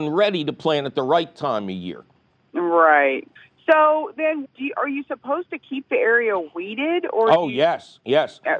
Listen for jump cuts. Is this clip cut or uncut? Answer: cut